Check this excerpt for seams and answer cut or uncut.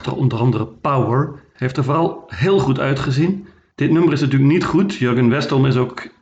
cut